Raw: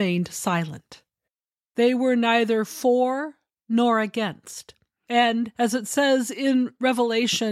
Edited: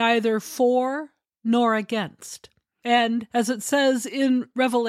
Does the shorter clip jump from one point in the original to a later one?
no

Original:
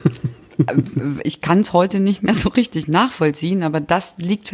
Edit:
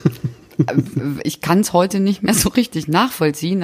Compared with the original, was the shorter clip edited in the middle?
no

